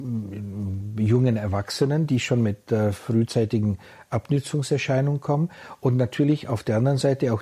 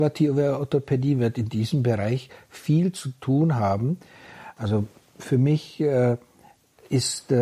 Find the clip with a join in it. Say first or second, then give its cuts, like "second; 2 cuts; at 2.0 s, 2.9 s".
second; 1 cut; at 4.6 s